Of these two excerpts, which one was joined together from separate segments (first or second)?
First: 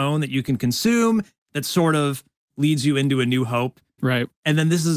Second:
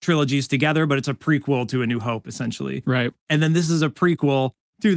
first